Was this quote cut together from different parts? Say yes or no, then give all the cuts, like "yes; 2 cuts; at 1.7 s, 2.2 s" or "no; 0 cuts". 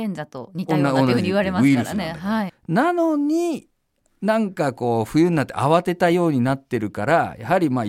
yes; 1 cut; at 2.5 s